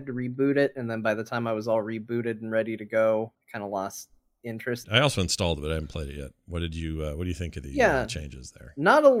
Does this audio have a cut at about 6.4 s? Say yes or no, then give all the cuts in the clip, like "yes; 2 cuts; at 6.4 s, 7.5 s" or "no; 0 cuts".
no; 2 cuts; at 3.3 s, 4.8 s